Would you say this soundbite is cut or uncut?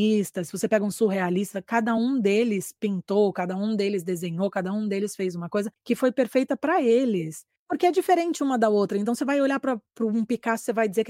uncut